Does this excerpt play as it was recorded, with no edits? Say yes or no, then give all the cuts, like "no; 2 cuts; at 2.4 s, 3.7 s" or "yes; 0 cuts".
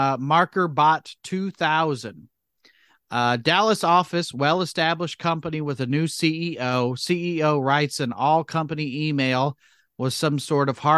yes; 0 cuts